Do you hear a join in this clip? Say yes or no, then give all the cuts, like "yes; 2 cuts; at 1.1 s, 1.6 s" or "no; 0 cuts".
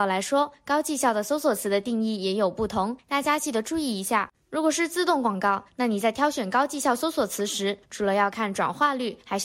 no; 0 cuts